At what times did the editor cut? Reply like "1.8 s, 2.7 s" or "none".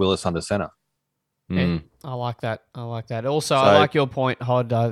none